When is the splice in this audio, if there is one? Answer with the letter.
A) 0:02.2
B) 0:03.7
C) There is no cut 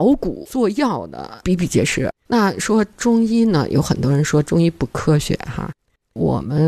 A